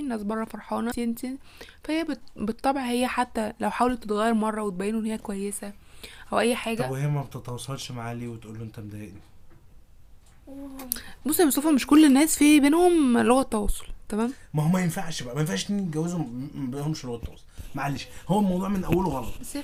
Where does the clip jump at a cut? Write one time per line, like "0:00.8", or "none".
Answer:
0:00.9